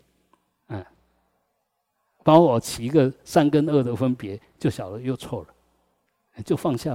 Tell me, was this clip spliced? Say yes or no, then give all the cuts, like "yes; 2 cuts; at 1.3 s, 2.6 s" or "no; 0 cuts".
no; 0 cuts